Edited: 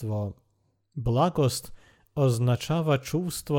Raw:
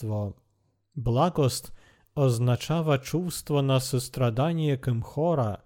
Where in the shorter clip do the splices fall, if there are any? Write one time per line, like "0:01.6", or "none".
none